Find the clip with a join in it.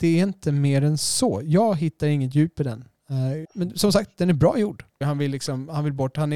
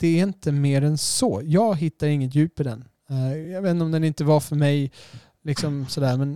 first; 2 cuts; at 3.4 s, 5.0 s

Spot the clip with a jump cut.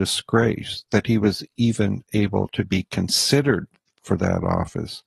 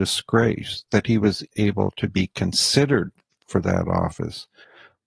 second; 1 cut; at 1.5 s

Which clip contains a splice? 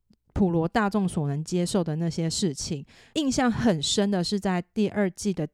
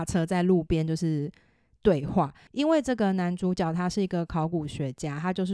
first; 1 cut; at 3.1 s

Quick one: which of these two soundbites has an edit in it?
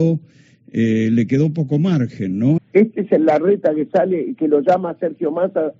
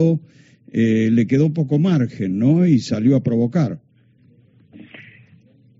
first; 1 cut; at 2.6 s

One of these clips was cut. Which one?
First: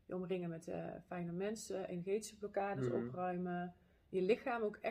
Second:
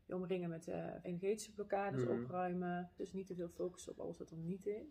second; 2 cuts; at 1.0 s, 3.0 s

